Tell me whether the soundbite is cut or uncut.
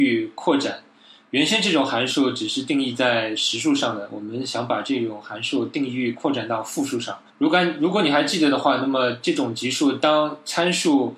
cut